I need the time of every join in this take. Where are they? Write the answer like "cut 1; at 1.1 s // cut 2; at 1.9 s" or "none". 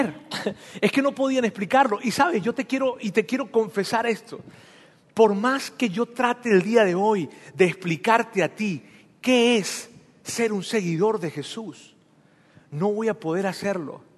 none